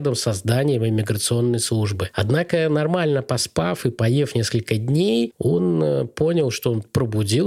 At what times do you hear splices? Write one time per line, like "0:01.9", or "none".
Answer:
none